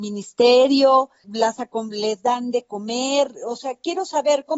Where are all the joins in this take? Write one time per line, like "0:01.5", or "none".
0:01.2